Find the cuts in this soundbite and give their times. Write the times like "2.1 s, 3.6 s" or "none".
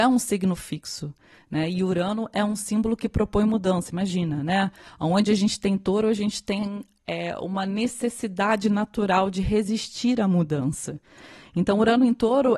none

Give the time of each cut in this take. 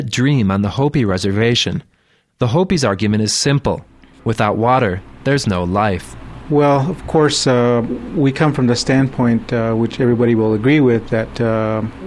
2.3 s

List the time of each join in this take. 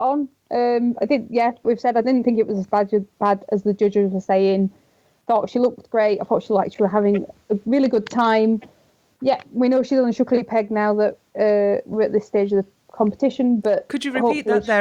1.6 s

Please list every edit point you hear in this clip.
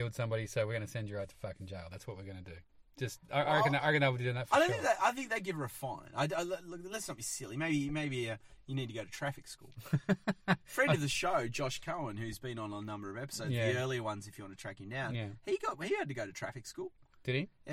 none

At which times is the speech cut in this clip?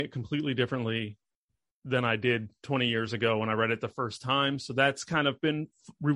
none

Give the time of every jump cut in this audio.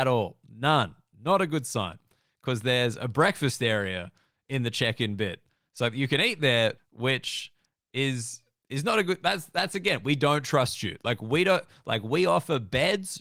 6.8 s

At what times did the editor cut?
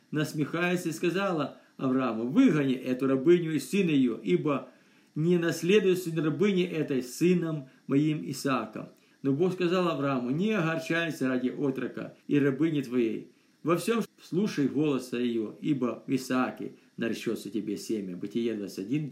9.1 s, 12.2 s, 14.0 s

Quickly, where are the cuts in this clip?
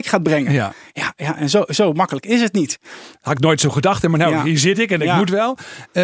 3.1 s

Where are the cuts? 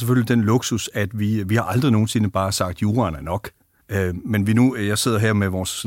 3.8 s

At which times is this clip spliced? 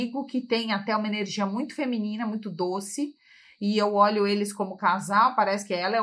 none

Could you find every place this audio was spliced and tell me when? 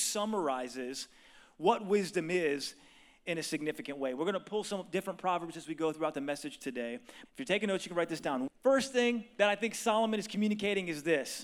7.2 s, 8.5 s

